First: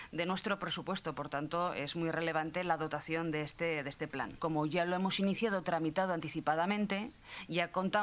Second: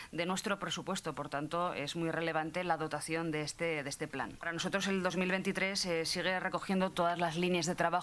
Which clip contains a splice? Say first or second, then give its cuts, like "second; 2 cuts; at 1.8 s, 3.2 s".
second; 1 cut; at 4.4 s